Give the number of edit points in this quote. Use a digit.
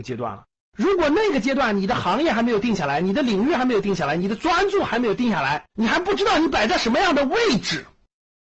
1